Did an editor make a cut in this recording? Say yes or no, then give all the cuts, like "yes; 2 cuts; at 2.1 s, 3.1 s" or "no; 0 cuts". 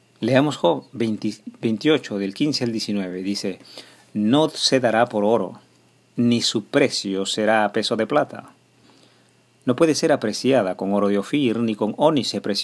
no; 0 cuts